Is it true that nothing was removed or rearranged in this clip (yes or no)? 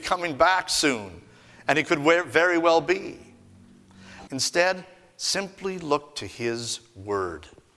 no